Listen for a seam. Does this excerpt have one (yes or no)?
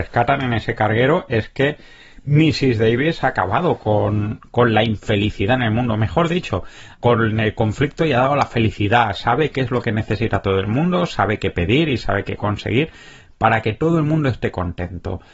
yes